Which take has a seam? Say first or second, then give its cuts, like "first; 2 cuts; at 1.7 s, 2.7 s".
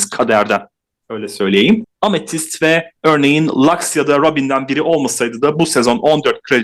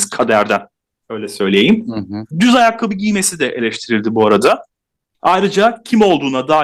first; 2 cuts; at 1.8 s, 3.0 s